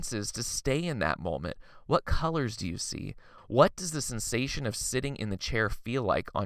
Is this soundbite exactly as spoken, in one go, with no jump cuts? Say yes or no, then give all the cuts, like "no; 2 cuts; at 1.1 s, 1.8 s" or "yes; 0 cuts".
no; 1 cut; at 3.4 s